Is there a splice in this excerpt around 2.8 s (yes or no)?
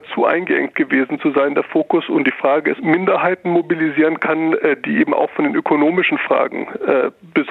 yes